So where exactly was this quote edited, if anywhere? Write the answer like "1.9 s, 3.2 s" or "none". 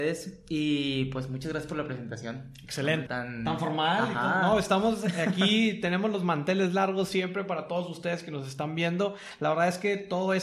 3.1 s